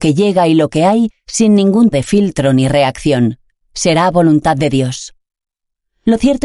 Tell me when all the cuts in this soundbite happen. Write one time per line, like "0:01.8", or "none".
0:01.9

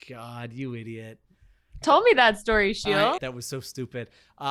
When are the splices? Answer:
0:01.8
0:03.2

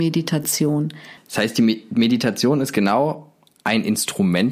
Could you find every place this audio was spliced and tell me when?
0:01.2

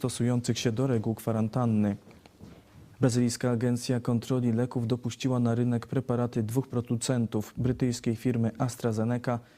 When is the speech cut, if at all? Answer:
0:02.9

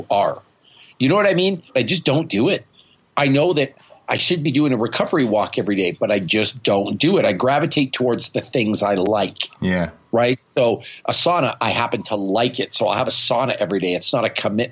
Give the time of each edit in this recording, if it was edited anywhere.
0:01.7

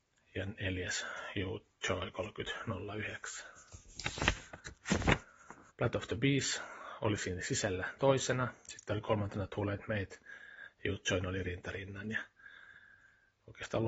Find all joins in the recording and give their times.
0:05.7

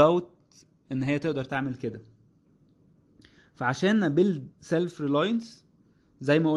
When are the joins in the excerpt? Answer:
0:04.5

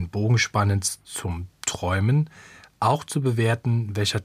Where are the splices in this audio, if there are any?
none

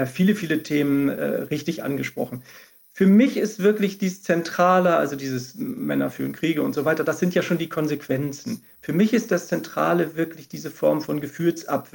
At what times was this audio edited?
none

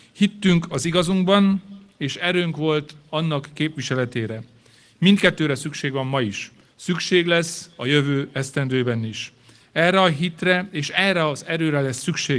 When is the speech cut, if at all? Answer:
0:06.7

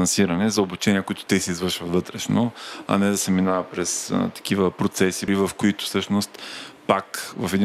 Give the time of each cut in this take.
0:05.3

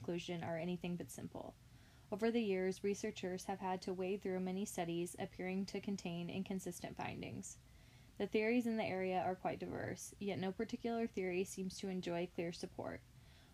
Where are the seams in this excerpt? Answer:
none

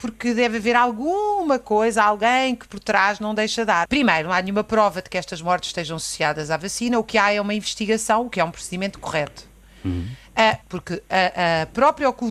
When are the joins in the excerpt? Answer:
0:03.9
0:10.6

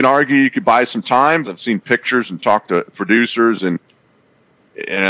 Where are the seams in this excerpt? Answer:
0:01.4

